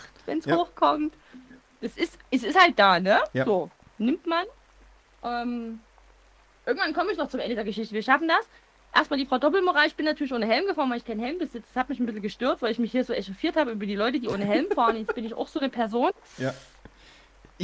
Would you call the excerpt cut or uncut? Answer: uncut